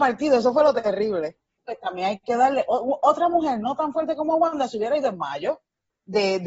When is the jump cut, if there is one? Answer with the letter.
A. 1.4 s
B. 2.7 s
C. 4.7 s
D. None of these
D